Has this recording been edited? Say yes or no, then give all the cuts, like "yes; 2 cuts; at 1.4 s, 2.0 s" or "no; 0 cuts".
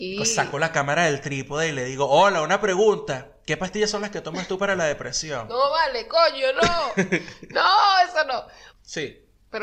yes; 1 cut; at 8.7 s